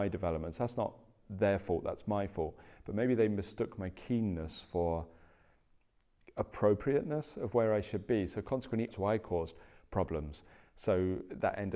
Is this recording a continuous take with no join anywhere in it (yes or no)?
no